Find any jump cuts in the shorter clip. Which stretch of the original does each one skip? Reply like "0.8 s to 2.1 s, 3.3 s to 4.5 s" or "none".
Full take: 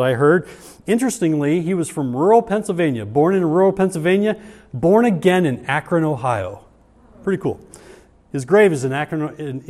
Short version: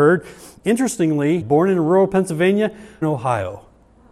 1.6 s to 3.1 s, 4.7 s to 6.0 s